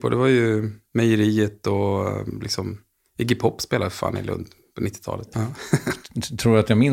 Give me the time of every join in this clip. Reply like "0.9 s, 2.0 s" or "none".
5.3 s

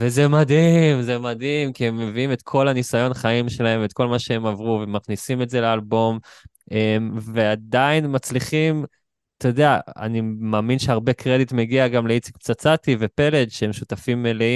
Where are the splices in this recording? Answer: none

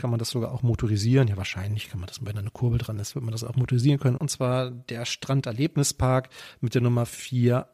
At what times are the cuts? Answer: 4.1 s

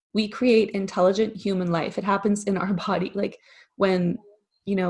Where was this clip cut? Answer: none

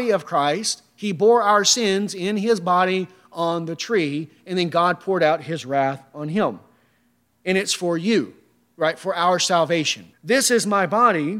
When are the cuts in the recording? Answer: 10.1 s

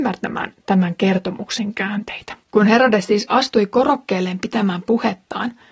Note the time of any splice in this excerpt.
2.4 s

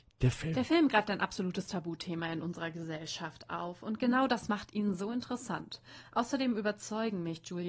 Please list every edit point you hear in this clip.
none

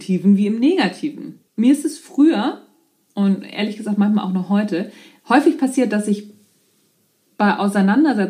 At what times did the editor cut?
1.5 s

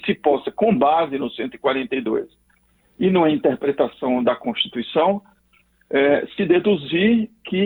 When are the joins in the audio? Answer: none

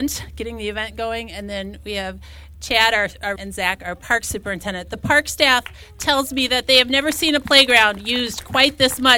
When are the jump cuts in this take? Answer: 3.4 s

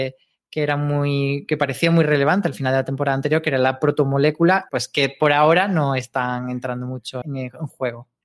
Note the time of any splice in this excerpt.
4.7 s, 7.2 s

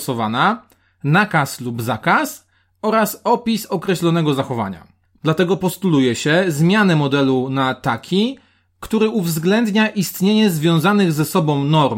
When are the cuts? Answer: 5.2 s

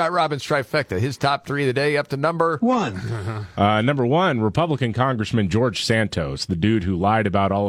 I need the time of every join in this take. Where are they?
none

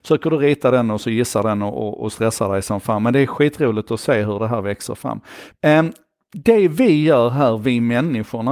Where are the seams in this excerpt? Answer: 5.5 s

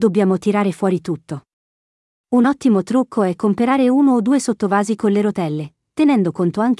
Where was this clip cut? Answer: 5.9 s

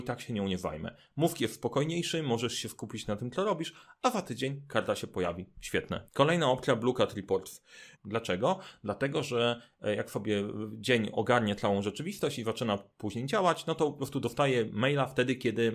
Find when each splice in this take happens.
6.0 s, 7.9 s

